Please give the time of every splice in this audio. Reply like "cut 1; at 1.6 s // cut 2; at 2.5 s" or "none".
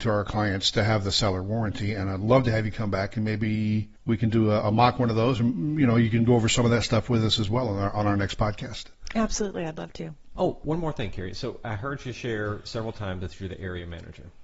none